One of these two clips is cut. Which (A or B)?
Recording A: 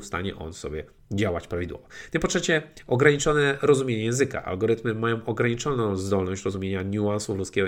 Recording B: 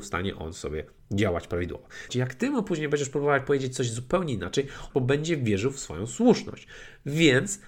B